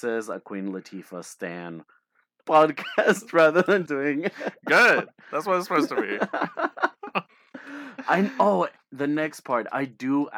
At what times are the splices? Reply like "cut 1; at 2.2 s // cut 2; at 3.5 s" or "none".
cut 1; at 3.9 s